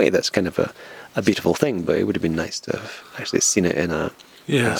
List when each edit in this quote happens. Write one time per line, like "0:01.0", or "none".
none